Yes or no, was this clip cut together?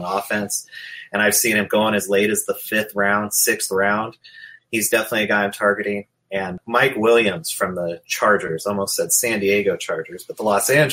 no